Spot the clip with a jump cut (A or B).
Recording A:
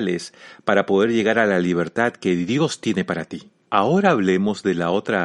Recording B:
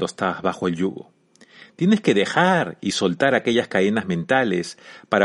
A